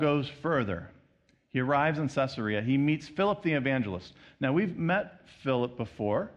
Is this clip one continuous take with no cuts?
yes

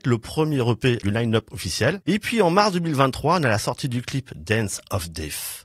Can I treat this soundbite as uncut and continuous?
no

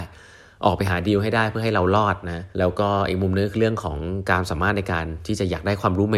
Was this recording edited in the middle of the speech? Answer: yes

